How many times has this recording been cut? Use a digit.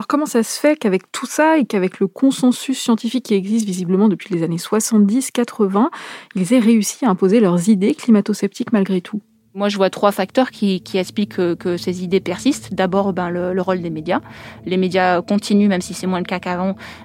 0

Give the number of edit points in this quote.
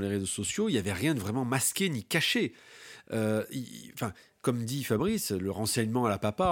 0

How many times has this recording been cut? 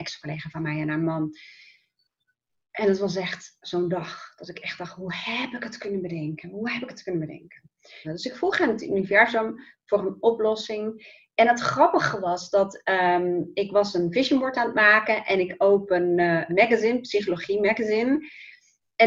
2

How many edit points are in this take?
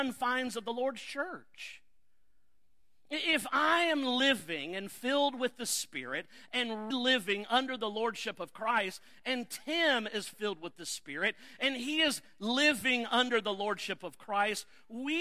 1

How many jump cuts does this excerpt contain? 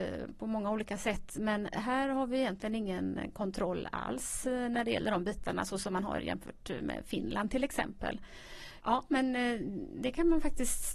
1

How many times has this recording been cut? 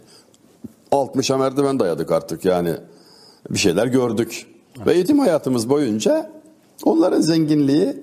0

